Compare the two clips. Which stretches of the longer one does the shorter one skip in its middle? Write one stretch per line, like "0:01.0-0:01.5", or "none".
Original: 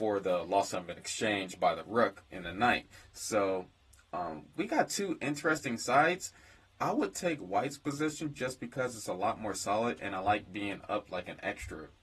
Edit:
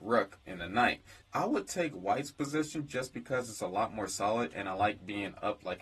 0:03.1-0:06.7

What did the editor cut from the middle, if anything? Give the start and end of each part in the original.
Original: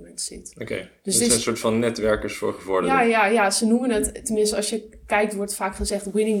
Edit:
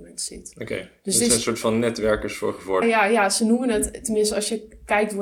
0:02.8-0:03.0

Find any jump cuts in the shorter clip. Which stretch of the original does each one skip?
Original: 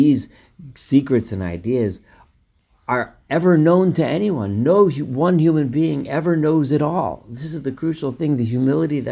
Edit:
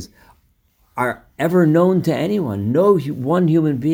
none

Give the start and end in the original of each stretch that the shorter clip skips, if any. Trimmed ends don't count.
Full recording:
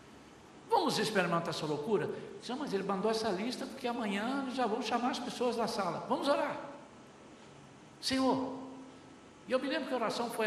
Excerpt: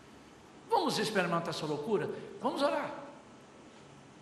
0:02.4-0:06.1

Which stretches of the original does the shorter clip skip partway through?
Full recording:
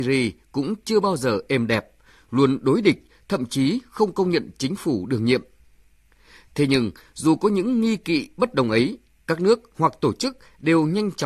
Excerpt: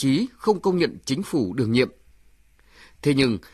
none

